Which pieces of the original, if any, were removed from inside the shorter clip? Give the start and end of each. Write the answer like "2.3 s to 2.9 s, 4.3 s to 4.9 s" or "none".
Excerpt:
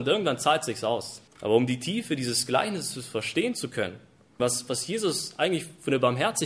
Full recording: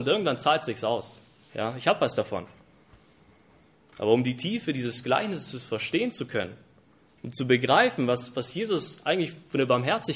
1.3 s to 3.8 s, 7.0 s to 8.1 s